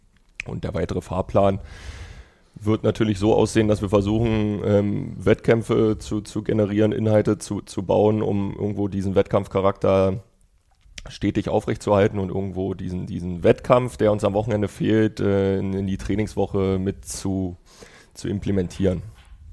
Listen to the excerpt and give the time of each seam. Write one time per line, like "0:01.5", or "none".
none